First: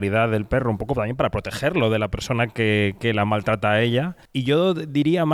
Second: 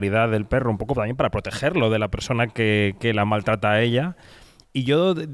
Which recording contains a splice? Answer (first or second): first